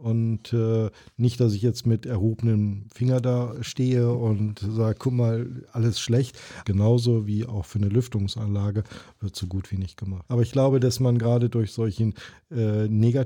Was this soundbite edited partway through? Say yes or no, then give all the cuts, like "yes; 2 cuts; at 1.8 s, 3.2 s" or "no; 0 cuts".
yes; 3 cuts; at 3.6 s, 6.6 s, 10.2 s